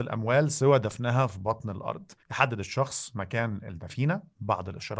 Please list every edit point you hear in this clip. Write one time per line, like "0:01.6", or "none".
0:02.2